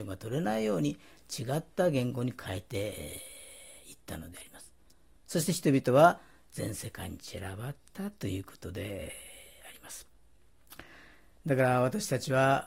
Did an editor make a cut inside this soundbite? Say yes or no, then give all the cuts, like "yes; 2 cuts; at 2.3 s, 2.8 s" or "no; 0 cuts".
no; 0 cuts